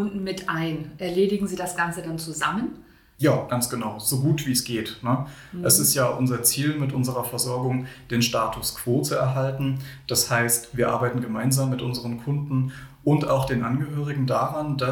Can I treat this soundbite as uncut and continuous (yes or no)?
yes